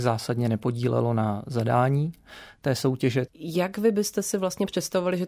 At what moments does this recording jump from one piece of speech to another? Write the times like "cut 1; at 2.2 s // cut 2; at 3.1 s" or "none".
cut 1; at 3.3 s

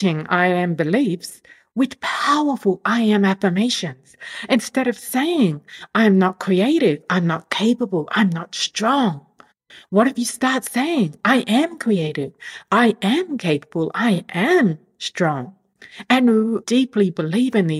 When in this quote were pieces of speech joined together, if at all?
cut 1; at 16.6 s

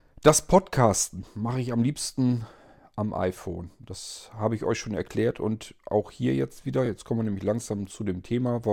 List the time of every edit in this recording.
none

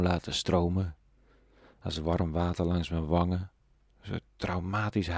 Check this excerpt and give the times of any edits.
cut 1; at 3.9 s

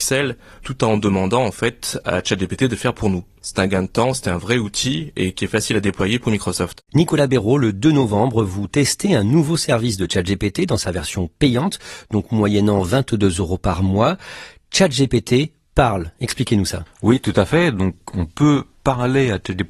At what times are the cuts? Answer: none

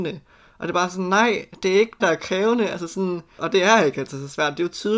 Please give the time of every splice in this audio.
cut 1; at 2.0 s // cut 2; at 3.4 s

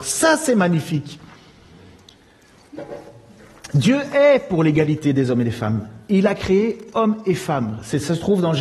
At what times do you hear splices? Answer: none

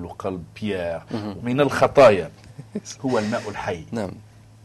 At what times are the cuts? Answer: cut 1; at 1.4 s

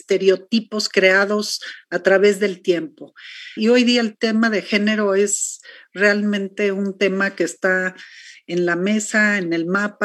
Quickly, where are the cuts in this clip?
cut 1; at 3.6 s

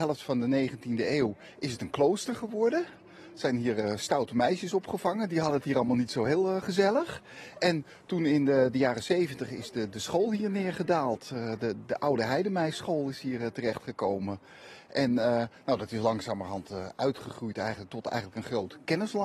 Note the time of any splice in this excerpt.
none

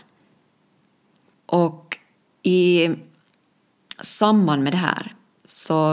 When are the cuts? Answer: cut 1; at 1.3 s

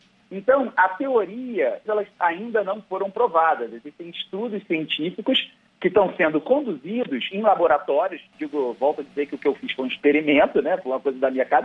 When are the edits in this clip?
cut 1; at 1.9 s

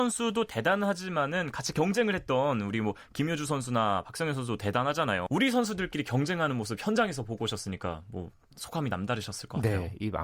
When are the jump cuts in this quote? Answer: cut 1; at 5.3 s

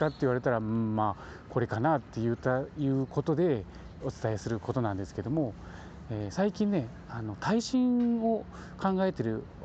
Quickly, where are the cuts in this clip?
cut 1; at 4.0 s

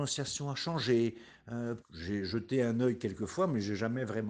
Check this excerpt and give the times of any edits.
cut 1; at 1.8 s

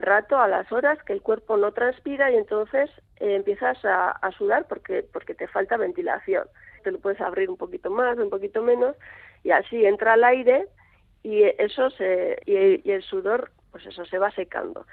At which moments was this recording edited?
cut 1; at 6.8 s // cut 2; at 12.4 s

